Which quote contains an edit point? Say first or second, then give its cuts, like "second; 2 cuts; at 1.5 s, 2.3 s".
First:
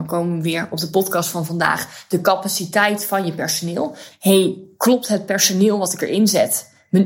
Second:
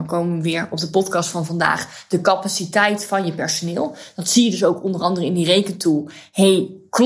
first; 1 cut; at 4.1 s